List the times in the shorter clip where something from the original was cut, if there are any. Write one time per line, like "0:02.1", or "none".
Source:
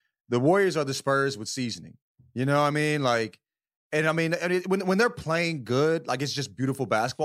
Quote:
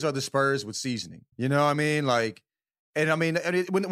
0:01.3